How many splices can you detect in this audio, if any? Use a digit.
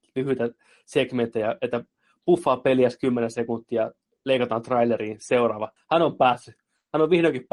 1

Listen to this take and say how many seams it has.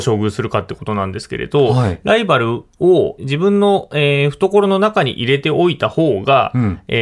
1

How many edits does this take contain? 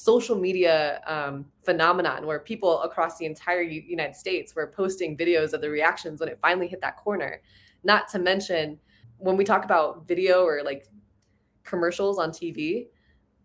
1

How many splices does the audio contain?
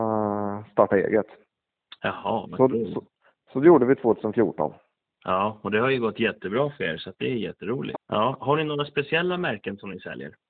1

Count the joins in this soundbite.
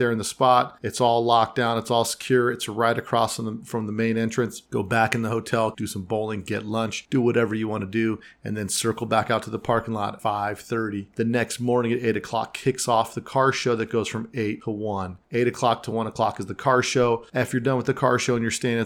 2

